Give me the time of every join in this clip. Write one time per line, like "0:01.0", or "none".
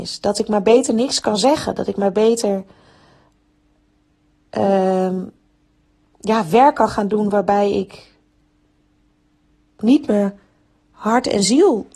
none